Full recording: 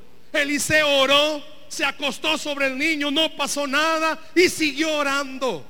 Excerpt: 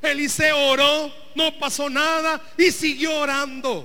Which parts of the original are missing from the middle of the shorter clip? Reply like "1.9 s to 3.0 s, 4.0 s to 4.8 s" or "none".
1.7 s to 3.1 s